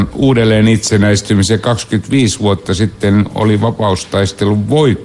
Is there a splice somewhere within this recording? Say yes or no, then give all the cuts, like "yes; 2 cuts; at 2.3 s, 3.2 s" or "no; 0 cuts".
no; 0 cuts